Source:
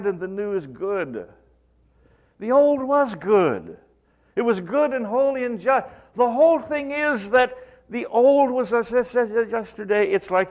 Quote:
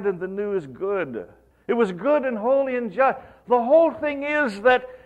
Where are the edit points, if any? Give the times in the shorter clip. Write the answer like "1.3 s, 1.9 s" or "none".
1.5 s